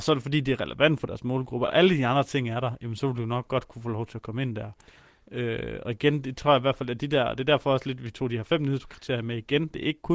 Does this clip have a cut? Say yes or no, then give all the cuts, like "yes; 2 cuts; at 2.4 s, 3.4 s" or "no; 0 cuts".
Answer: no; 0 cuts